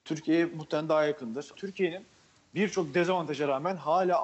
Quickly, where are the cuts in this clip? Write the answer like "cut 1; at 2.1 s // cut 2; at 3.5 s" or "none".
cut 1; at 1.5 s